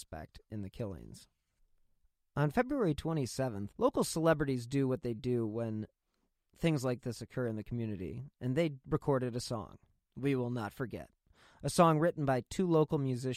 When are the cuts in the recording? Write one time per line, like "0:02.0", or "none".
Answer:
0:03.7